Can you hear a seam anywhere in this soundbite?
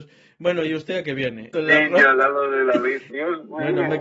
yes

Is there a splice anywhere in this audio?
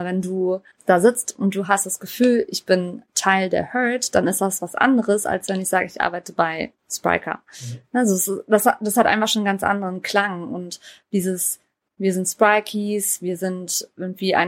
no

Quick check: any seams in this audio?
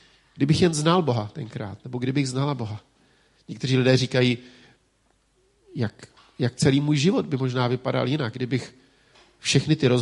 no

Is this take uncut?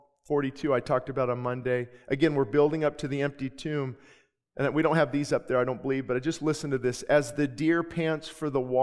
yes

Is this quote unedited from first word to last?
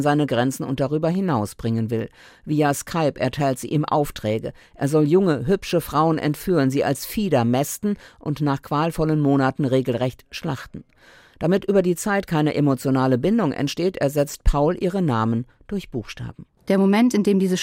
yes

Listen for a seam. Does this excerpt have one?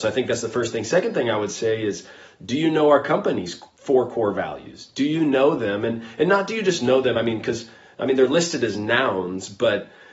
no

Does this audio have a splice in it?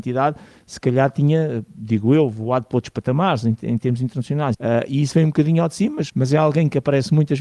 yes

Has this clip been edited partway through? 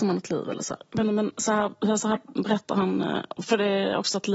no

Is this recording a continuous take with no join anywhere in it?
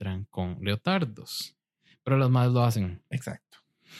yes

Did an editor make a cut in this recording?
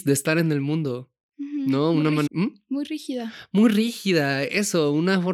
yes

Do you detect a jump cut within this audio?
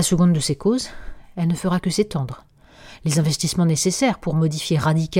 no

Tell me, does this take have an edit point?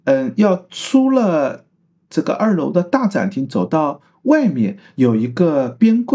no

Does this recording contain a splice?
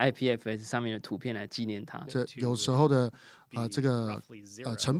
yes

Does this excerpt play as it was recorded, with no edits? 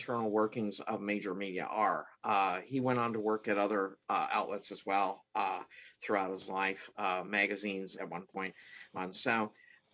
no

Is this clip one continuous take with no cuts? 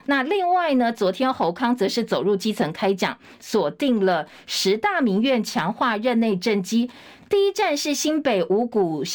yes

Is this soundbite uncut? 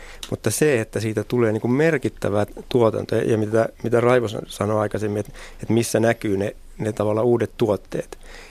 yes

